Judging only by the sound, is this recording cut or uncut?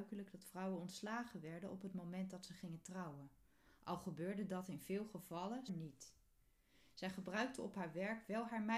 cut